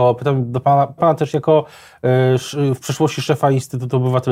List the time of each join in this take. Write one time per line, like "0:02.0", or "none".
0:01.0